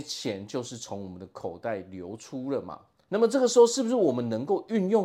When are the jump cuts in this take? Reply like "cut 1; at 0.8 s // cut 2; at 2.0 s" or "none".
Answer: none

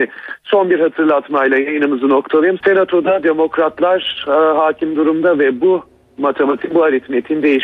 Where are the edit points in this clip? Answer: cut 1; at 2.6 s

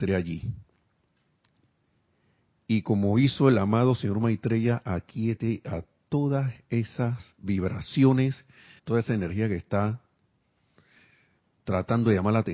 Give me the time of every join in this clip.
cut 1; at 8.8 s

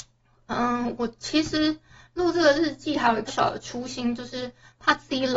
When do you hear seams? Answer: cut 1; at 3.3 s

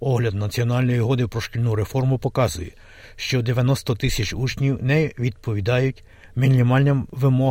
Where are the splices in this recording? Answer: none

